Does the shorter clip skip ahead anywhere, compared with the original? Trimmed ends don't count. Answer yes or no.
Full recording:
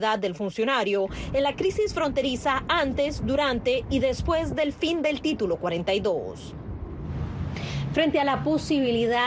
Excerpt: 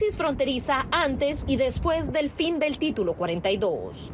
yes